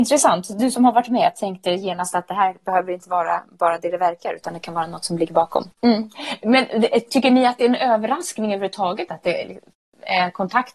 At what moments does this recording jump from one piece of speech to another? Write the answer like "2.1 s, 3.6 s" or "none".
5.7 s

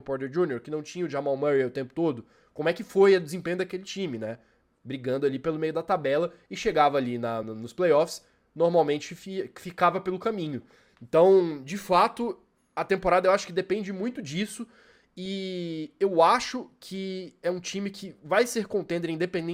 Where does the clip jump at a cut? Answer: 7.4 s

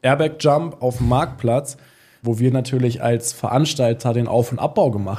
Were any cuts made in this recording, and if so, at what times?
2.2 s

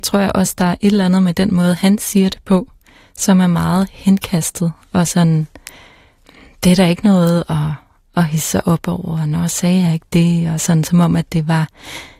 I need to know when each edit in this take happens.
none

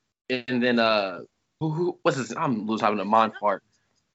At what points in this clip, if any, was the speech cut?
1.6 s

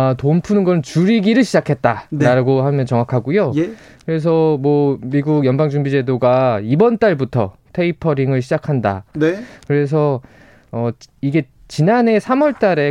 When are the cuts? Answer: 9.1 s

